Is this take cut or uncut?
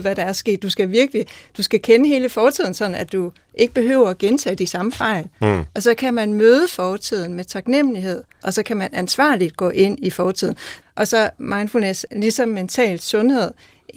cut